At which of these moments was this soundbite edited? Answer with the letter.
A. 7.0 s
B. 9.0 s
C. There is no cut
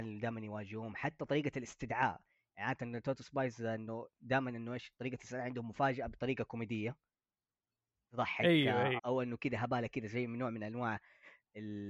B